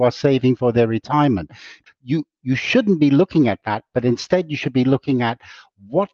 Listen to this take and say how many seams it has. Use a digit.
1